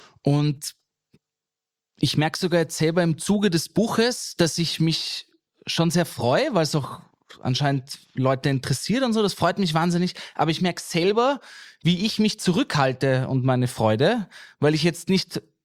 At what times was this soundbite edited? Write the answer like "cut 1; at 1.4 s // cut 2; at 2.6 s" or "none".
none